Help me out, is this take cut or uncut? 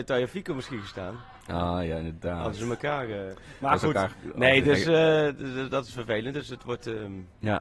uncut